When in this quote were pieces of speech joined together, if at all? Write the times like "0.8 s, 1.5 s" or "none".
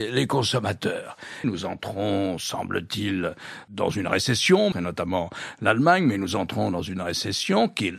1.4 s, 4.7 s